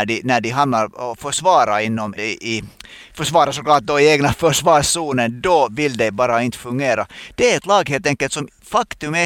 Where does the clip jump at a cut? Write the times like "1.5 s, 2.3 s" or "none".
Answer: 2.1 s